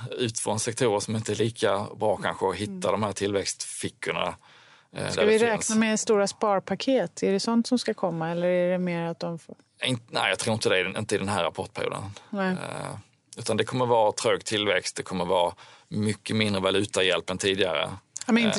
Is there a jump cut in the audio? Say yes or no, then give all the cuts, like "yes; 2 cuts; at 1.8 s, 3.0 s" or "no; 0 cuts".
no; 0 cuts